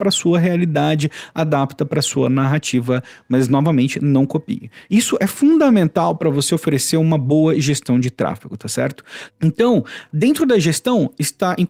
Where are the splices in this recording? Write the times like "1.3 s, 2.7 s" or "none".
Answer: 9.3 s